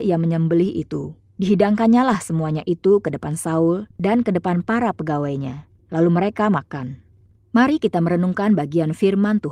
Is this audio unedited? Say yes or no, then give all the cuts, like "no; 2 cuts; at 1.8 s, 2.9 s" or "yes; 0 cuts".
no; 2 cuts; at 1.3 s, 7.4 s